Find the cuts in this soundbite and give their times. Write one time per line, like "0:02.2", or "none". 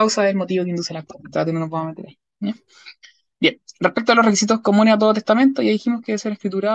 none